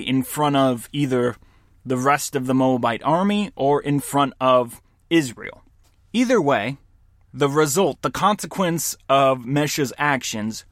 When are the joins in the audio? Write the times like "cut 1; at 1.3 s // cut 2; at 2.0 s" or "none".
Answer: cut 1; at 7.3 s